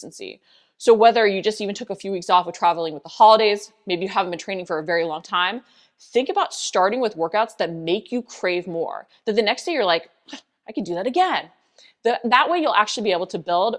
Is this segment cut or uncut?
uncut